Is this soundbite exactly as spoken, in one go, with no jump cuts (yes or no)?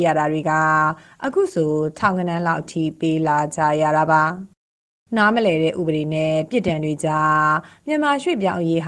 yes